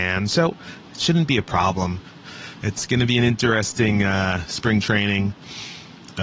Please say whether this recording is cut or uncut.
cut